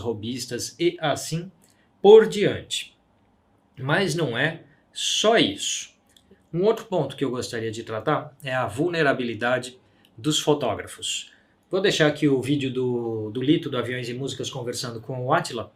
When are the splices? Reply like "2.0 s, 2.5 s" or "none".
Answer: 11.6 s